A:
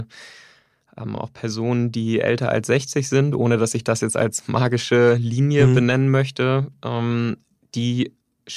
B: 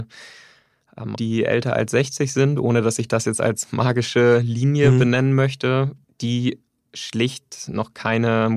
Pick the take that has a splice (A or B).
B